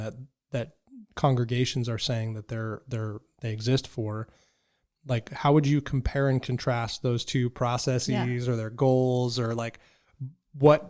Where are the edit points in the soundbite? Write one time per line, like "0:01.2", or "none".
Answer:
none

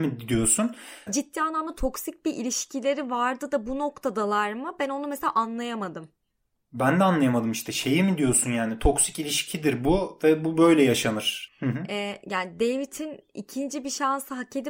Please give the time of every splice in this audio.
0:01.1
0:11.5

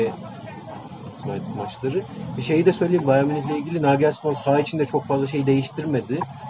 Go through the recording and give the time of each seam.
0:01.2

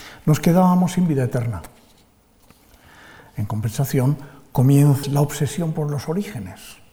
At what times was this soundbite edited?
0:05.0

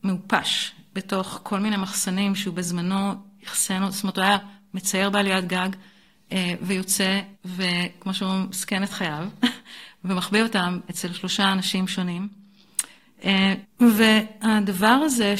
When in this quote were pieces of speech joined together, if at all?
0:07.3
0:13.6

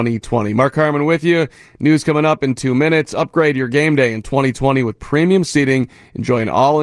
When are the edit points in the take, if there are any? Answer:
none

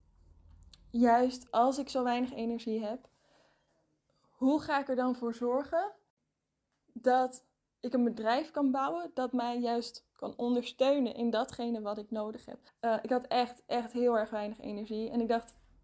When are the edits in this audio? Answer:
0:01.5
0:12.7

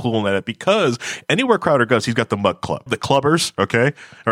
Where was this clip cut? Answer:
0:02.9

